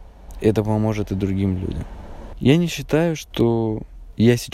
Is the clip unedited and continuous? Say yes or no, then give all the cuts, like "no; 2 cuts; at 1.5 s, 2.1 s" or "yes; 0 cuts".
yes; 0 cuts